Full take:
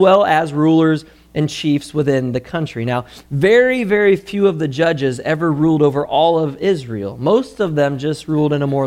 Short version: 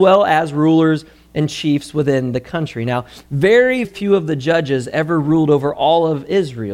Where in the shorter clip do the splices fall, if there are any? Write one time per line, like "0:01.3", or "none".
0:03.8

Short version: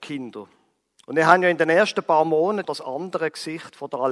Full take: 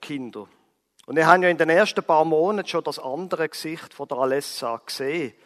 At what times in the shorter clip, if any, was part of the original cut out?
0:02.6

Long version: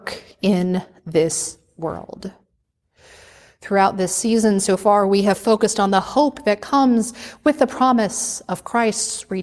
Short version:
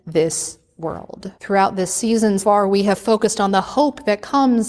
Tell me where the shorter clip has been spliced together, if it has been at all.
0:01.4
0:02.4

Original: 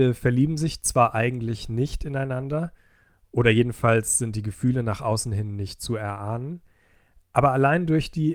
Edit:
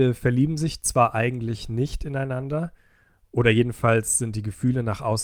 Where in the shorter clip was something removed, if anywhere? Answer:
none

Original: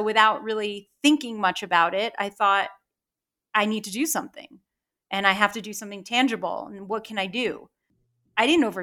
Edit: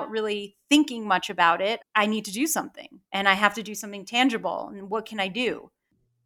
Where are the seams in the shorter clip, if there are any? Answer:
0:01.8
0:03.0

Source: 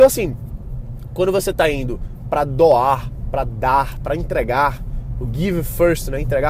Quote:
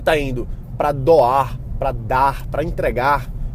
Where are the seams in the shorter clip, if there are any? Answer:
none

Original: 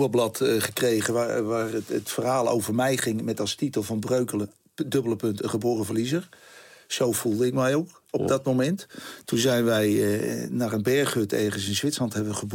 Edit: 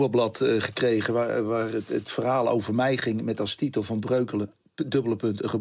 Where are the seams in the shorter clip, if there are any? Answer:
none

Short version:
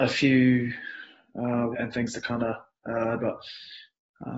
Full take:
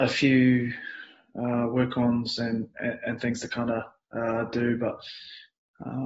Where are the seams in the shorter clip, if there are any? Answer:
0:01.7
0:03.2

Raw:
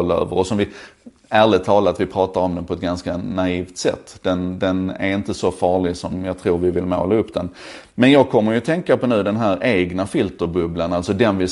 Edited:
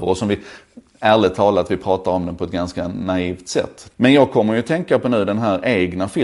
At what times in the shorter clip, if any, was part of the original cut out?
0:03.9

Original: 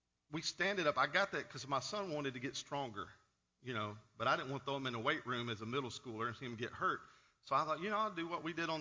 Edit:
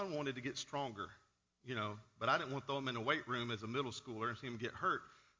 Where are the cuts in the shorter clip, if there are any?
none

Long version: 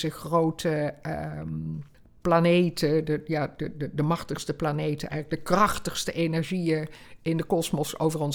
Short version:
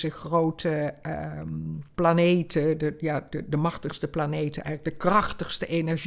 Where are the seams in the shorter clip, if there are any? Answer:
0:01.9
0:03.5

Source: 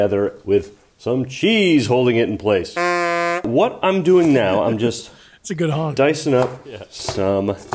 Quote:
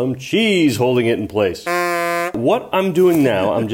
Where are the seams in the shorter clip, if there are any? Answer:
none

